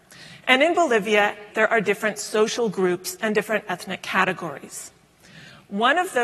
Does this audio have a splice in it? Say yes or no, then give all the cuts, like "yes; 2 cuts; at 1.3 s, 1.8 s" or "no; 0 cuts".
yes; 1 cut; at 1.5 s